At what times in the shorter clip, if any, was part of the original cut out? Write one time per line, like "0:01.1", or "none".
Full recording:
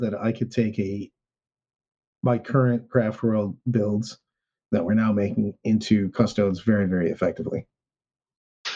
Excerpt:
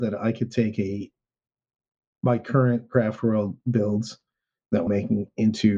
0:04.9